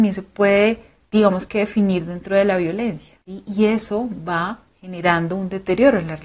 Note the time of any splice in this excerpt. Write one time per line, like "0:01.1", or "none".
0:03.2

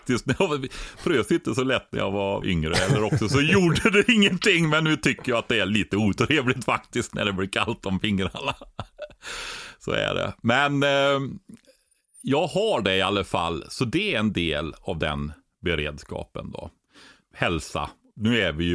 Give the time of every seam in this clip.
0:02.4

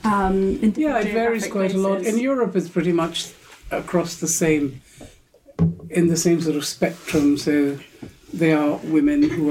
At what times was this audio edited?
none

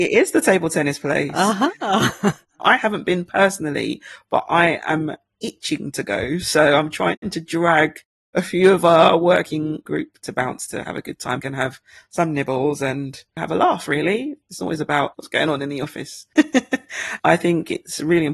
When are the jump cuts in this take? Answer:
0:11.4
0:16.4

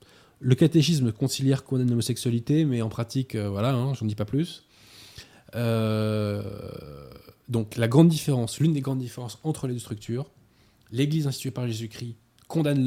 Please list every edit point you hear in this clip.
none

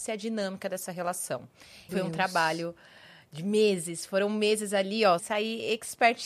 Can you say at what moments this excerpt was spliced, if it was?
0:01.9
0:05.2

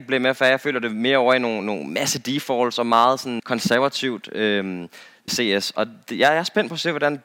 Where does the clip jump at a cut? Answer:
0:03.4
0:05.3

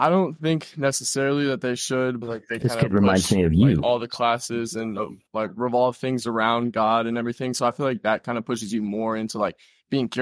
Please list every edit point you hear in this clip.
0:02.2

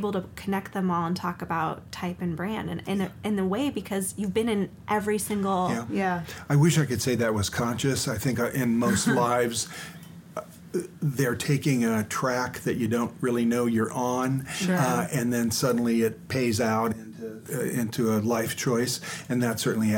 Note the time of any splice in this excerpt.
none

